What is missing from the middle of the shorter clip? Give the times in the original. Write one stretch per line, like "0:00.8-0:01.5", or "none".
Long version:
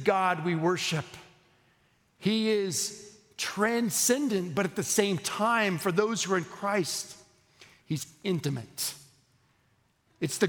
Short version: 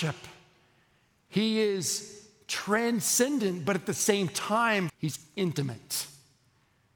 0:05.8-0:07.8